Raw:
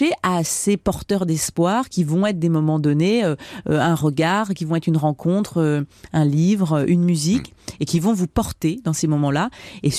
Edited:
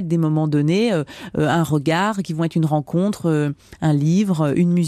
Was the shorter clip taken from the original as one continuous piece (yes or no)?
yes